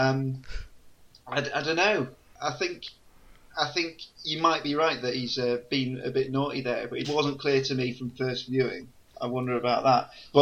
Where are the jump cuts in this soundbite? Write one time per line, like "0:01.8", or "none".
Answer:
0:07.0
0:09.1